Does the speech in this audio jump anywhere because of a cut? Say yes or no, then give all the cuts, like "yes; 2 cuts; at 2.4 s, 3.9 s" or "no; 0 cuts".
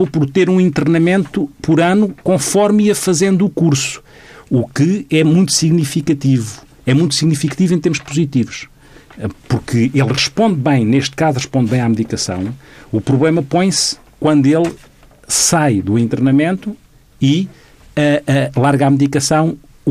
no; 0 cuts